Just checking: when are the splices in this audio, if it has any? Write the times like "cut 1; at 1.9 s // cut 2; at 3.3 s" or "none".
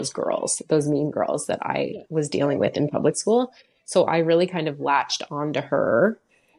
none